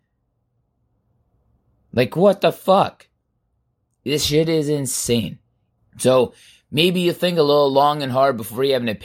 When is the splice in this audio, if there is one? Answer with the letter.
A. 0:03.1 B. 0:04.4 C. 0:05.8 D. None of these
C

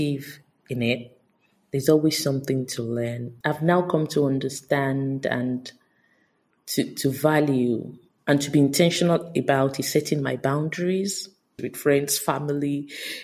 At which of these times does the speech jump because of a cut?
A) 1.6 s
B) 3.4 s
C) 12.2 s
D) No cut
B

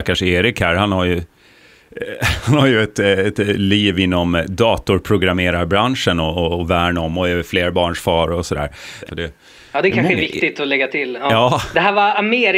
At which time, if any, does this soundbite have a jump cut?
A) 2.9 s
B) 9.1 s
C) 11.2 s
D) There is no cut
B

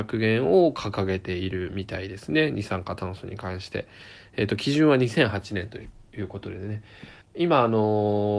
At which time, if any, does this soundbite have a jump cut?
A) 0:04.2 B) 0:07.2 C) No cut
B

